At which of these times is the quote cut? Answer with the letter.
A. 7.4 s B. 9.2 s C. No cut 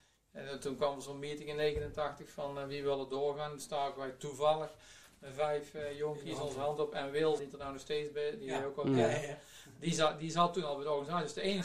A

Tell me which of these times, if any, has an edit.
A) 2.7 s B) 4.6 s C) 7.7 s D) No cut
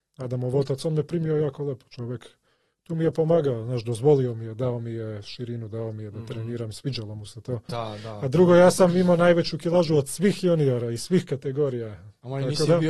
C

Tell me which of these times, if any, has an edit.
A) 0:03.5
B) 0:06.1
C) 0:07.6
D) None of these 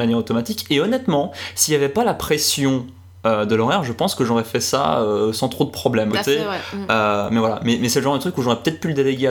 B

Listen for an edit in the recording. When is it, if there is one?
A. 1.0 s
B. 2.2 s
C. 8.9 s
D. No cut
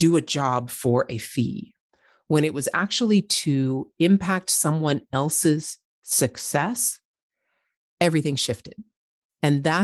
D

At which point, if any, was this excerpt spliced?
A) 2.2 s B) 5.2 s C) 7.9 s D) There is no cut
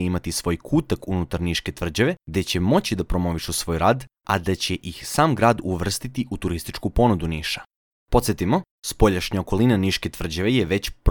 C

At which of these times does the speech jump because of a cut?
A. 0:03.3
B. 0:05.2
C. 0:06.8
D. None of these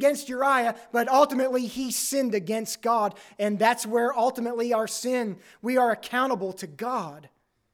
D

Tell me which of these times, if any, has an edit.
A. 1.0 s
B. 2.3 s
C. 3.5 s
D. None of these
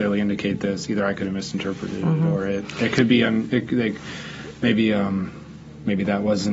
D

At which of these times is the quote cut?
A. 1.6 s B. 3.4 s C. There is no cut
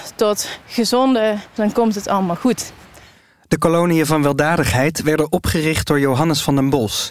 A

